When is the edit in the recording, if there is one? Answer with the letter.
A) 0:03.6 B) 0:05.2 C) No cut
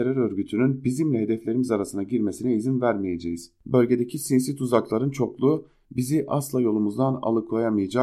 A